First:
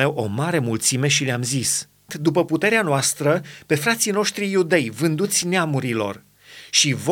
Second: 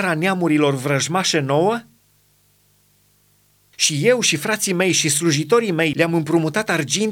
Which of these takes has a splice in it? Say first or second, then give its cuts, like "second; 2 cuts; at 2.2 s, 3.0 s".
first; 1 cut; at 2.1 s